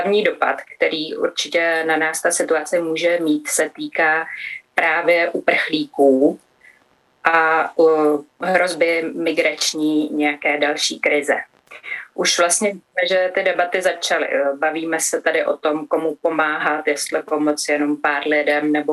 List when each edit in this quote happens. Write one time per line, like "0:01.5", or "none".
none